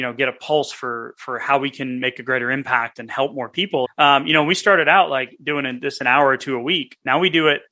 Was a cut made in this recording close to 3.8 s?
yes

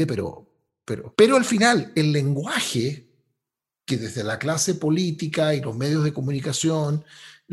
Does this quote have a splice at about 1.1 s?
yes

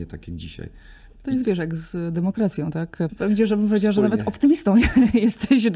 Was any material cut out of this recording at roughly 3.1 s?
yes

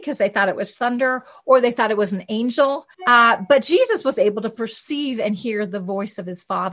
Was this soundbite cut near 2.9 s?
yes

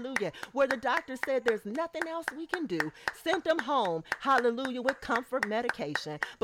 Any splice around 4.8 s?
no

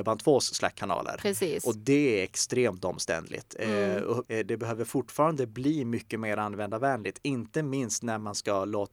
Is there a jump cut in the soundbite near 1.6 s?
no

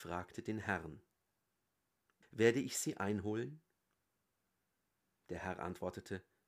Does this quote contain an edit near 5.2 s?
no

